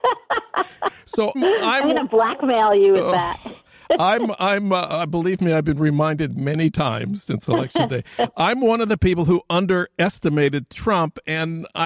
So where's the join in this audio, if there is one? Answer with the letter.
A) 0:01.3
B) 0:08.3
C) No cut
A